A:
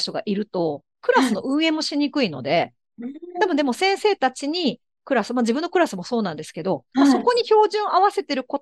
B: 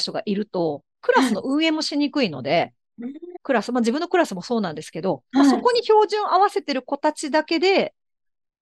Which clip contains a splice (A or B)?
B